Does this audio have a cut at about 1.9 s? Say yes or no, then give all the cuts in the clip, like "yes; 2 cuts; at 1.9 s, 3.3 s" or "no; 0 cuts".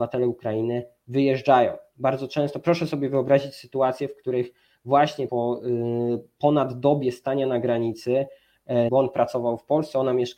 no; 2 cuts; at 5.3 s, 8.9 s